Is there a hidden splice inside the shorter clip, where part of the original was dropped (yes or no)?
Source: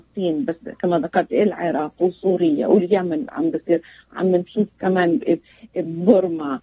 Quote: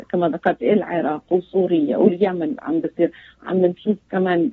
no